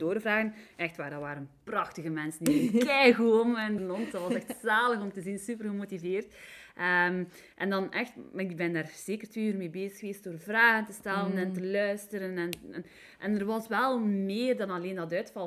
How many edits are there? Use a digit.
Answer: 1